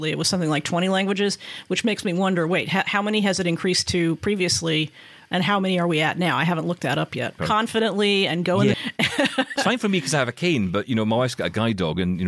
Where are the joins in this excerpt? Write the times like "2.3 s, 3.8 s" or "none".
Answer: 7.4 s, 8.7 s